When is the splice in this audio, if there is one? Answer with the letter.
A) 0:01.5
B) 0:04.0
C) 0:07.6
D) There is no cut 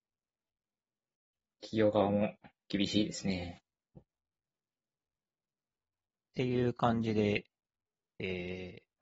B